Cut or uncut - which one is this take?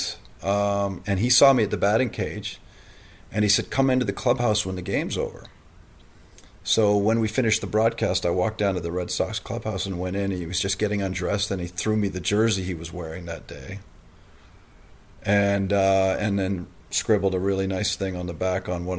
cut